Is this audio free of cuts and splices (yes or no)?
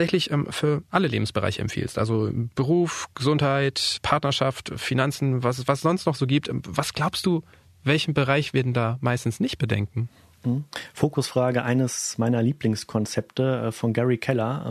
yes